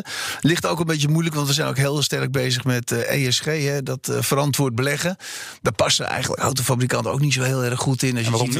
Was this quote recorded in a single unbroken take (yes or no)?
yes